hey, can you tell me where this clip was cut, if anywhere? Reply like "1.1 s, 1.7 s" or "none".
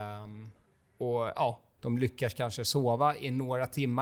1.8 s